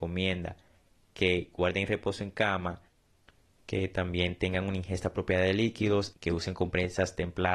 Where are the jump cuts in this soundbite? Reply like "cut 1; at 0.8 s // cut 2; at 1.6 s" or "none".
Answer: cut 1; at 6.1 s